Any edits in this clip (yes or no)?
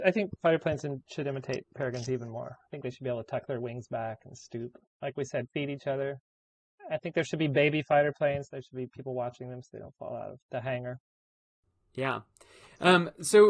yes